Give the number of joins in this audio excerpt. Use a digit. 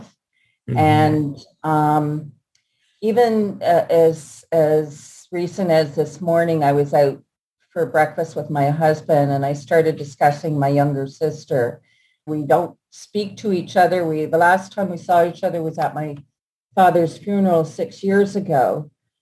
1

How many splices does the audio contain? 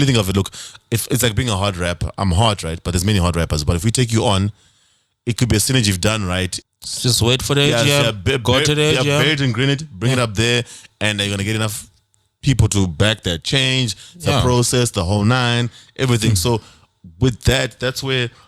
1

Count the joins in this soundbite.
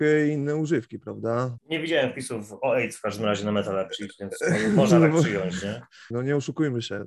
2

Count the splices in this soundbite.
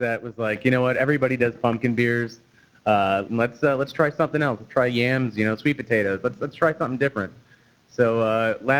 1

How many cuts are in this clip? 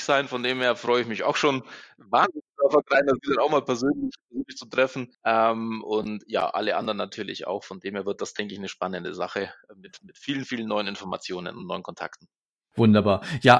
1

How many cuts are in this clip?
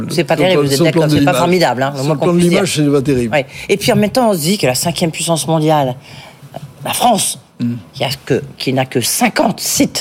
0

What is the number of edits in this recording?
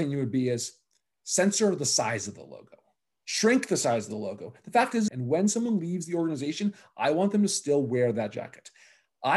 1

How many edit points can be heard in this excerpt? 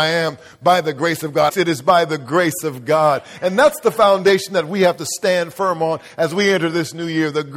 1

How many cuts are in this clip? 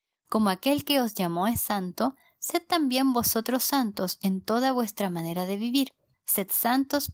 1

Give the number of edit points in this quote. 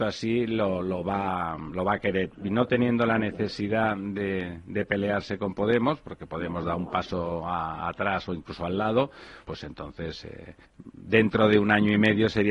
2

